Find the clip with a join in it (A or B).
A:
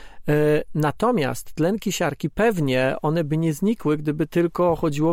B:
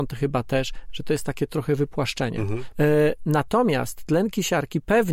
B